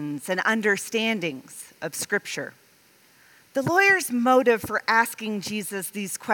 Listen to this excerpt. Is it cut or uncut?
uncut